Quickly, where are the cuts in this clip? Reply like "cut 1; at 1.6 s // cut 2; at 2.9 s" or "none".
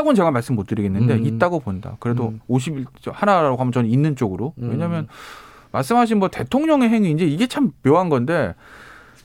none